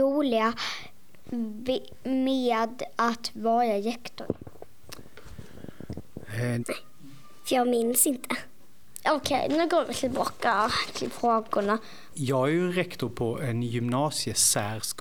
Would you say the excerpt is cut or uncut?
cut